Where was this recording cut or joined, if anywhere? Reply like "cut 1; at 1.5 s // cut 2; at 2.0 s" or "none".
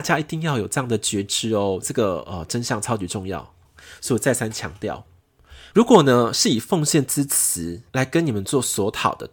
cut 1; at 5.7 s // cut 2; at 7.9 s